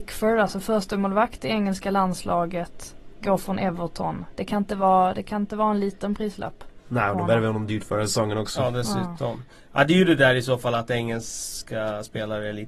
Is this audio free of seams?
yes; 0 cuts

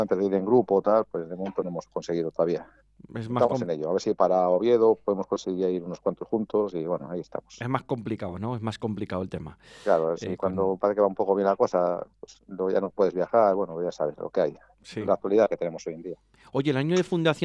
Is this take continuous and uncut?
yes; 0 cuts

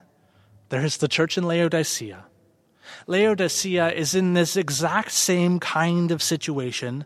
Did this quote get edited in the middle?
no; 0 cuts

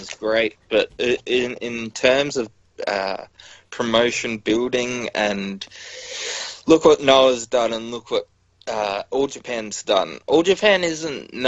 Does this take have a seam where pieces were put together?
no; 0 cuts

